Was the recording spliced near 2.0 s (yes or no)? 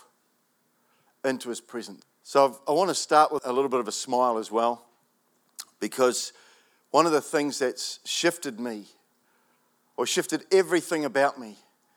yes